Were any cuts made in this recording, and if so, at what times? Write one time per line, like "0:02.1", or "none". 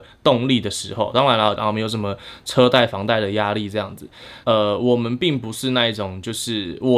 0:01.6
0:04.4

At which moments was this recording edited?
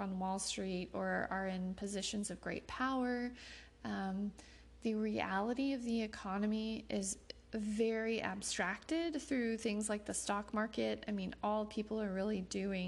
none

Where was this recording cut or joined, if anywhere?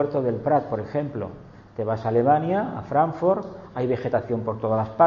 none

